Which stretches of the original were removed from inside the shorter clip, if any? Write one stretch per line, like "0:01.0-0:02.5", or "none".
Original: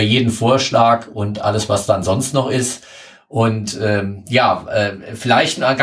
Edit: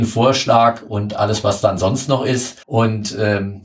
0:02.9-0:03.2